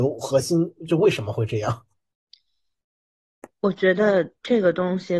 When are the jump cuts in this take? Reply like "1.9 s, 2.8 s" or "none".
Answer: none